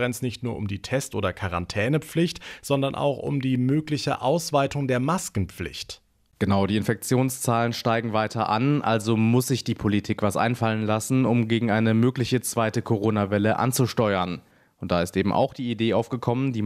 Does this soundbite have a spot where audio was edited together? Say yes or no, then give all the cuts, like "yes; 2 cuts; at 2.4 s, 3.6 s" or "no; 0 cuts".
no; 0 cuts